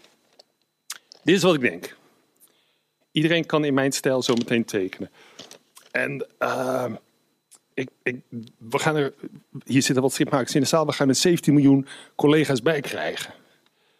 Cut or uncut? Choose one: cut